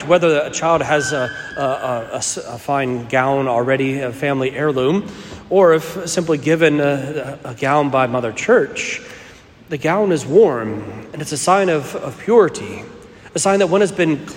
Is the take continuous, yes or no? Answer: yes